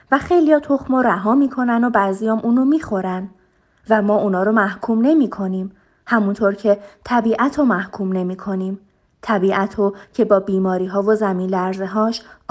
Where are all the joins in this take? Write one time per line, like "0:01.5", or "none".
none